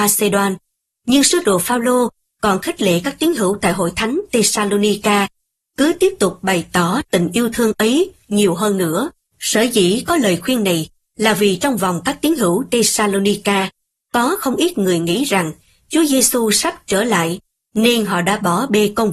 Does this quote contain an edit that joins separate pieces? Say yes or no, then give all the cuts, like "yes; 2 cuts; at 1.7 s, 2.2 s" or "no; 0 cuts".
yes; 1 cut; at 9.3 s